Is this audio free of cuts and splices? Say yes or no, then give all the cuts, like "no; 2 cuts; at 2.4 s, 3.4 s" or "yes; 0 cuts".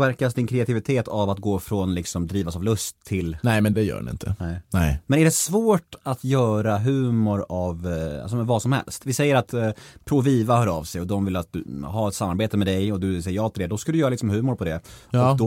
no; 1 cut; at 3.7 s